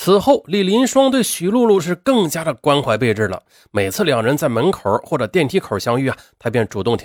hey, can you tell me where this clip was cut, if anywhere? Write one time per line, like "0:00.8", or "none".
none